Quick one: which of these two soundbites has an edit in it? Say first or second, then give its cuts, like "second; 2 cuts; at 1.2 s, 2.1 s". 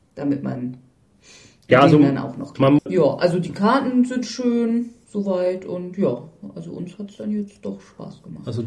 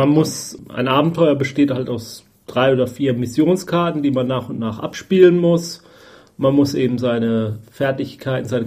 first; 1 cut; at 2.8 s